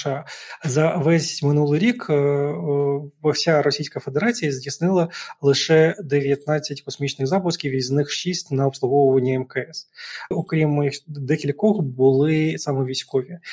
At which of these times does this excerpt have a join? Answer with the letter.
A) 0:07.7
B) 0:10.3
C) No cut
B